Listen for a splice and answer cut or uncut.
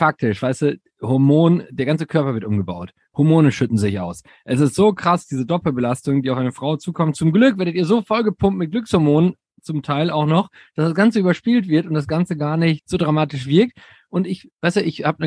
uncut